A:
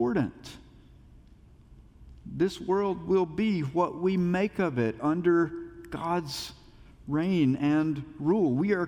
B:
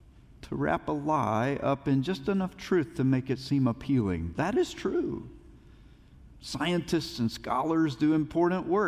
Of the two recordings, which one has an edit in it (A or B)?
B